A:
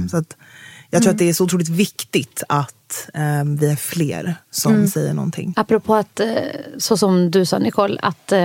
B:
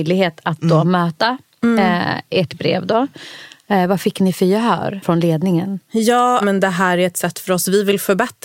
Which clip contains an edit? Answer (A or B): B